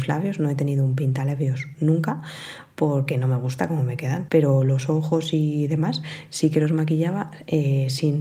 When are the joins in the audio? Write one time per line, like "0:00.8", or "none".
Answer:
0:04.3